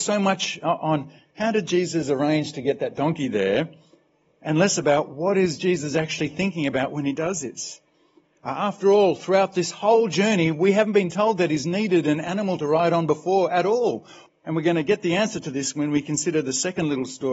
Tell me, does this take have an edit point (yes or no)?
yes